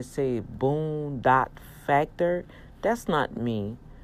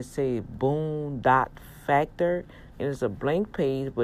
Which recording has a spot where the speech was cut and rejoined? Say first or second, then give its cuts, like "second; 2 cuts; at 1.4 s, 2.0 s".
second; 1 cut; at 2.7 s